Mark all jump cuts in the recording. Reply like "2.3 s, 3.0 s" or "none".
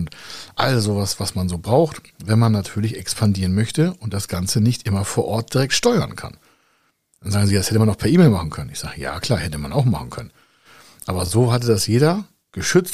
none